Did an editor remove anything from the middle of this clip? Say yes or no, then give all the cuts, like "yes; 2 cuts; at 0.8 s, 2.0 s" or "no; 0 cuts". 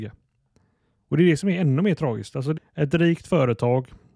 yes; 1 cut; at 2.6 s